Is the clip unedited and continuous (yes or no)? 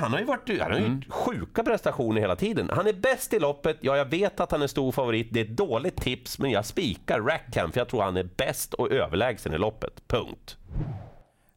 yes